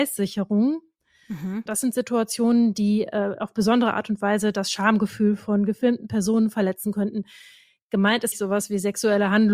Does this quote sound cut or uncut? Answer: cut